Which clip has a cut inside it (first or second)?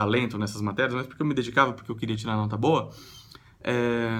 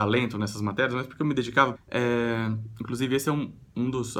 second